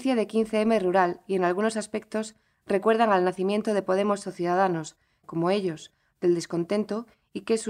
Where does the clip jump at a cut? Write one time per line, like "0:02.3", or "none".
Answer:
0:05.2